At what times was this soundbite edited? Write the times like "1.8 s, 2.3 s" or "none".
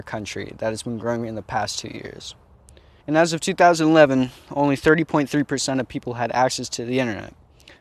3.0 s